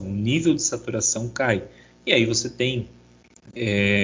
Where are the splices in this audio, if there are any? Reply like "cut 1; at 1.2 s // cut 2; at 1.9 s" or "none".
none